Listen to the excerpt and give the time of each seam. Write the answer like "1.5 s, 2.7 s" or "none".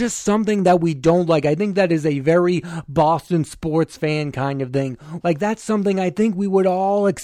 5.2 s